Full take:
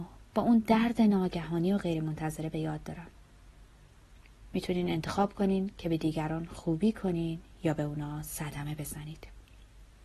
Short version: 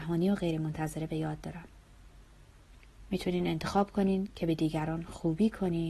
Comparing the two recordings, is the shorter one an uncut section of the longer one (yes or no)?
yes